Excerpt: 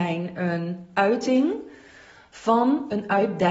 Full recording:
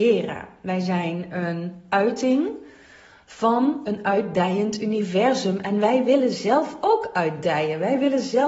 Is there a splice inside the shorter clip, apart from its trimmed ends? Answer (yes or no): no